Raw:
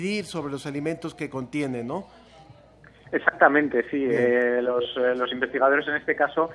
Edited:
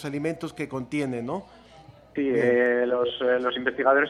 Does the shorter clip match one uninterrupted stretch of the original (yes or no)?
no